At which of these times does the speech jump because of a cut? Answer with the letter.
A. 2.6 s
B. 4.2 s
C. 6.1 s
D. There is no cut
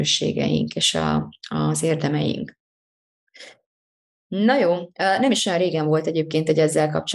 B